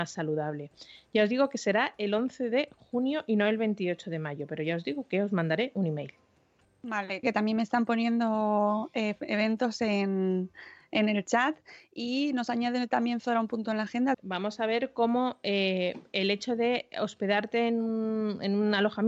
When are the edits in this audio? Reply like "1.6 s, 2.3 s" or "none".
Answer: 7.2 s, 14.1 s